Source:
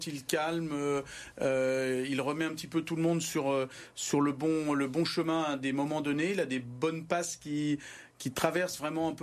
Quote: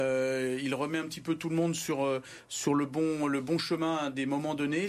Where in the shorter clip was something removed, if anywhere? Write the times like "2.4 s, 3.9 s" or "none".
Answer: none